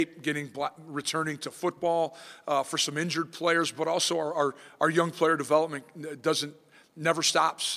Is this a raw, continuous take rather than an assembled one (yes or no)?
yes